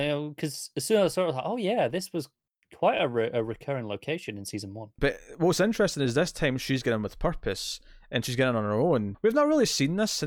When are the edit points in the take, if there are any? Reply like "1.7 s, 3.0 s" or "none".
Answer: 5.0 s, 9.1 s

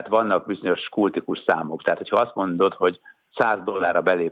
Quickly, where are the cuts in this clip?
none

